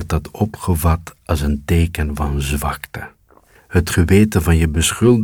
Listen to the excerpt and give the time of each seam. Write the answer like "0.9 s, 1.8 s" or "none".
3.6 s